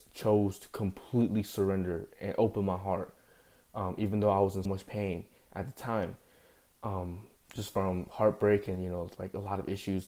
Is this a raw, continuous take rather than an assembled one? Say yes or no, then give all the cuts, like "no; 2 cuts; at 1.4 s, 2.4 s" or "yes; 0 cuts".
no; 1 cut; at 4.7 s